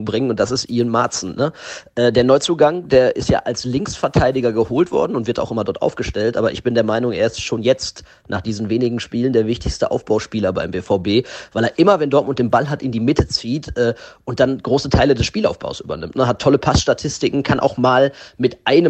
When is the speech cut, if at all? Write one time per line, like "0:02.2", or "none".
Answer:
none